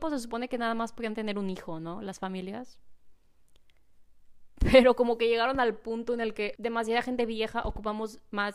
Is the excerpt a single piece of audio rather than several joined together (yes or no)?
no